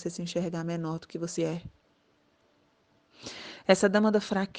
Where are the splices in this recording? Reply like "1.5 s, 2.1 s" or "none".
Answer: 1.4 s

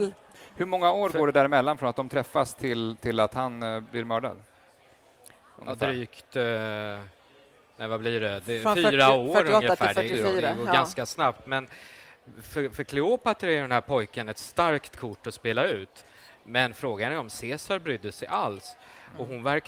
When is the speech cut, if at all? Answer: none

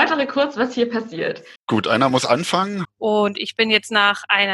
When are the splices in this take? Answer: 1.5 s, 2.8 s

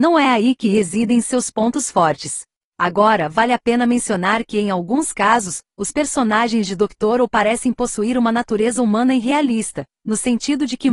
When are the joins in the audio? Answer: 2.6 s

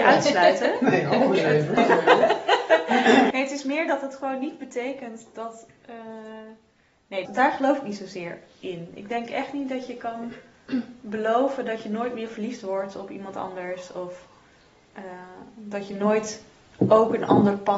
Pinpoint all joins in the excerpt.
1.8 s, 3.3 s, 7.3 s

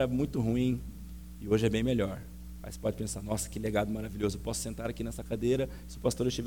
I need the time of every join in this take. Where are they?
none

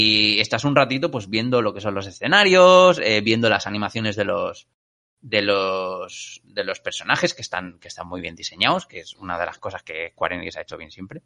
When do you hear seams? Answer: none

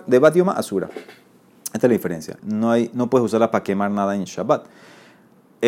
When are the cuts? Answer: 2.4 s

